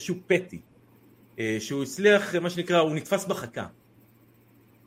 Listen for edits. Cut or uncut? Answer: uncut